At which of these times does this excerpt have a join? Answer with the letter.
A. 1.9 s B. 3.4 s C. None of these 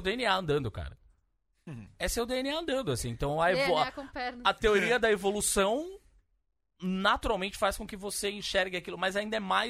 C